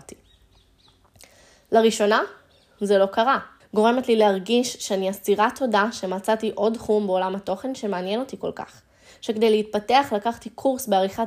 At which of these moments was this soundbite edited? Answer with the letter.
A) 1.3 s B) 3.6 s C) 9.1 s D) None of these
B